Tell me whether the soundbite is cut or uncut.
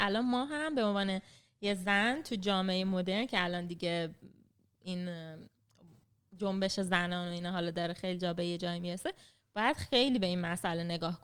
uncut